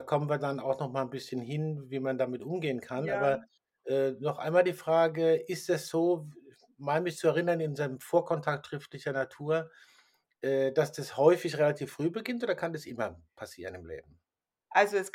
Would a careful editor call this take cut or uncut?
uncut